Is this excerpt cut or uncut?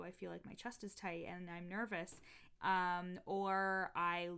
cut